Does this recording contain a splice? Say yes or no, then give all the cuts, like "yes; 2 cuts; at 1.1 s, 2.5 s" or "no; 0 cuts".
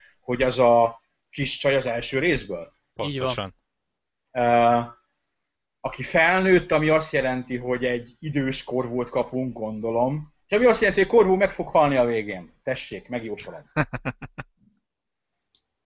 yes; 1 cut; at 10.4 s